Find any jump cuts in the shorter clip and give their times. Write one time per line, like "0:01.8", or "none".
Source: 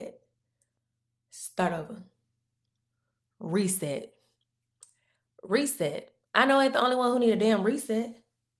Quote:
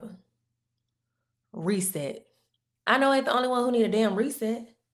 0:02.8